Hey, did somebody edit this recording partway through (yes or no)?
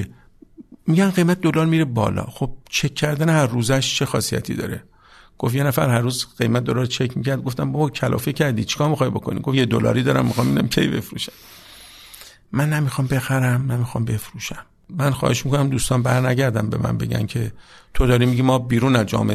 yes